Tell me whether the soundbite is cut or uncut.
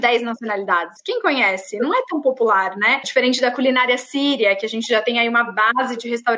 cut